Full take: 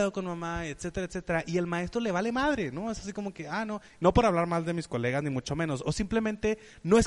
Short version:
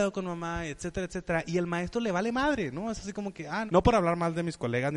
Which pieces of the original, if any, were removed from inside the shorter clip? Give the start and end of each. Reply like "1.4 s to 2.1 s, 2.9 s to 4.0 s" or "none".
3.7 s to 4.0 s